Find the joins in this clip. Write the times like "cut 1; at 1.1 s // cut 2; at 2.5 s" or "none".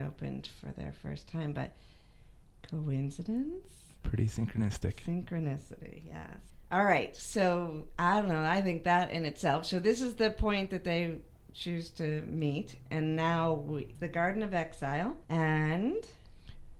cut 1; at 13.9 s // cut 2; at 15.2 s